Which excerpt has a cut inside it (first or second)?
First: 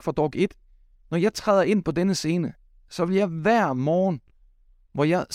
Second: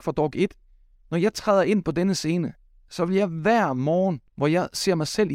second